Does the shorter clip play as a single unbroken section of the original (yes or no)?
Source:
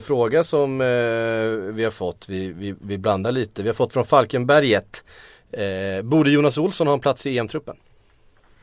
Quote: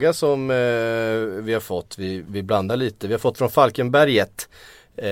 no